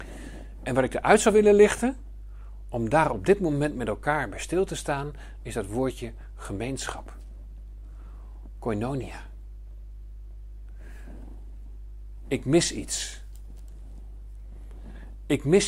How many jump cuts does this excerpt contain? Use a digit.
0